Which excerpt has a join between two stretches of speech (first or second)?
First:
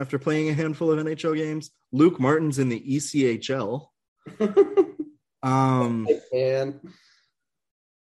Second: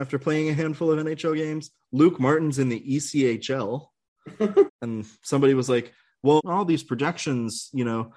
second